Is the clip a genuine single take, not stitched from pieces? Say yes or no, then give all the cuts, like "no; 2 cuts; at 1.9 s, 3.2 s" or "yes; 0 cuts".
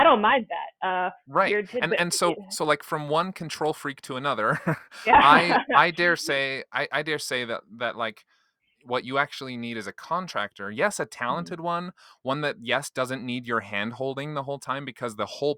yes; 0 cuts